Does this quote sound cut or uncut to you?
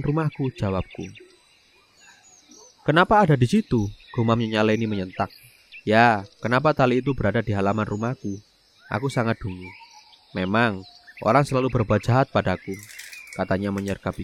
cut